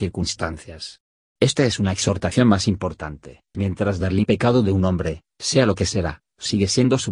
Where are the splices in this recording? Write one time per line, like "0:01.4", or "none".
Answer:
0:03.5

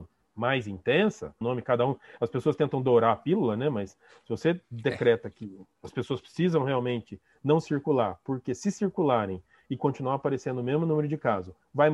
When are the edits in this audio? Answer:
0:01.4

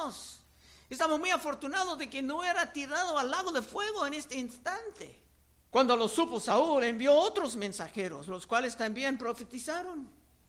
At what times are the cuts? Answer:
0:05.6

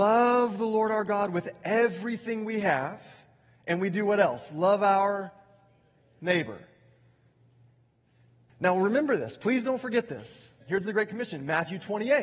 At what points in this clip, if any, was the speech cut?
0:08.5
0:10.6

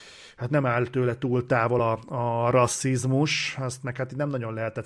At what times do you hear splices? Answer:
none

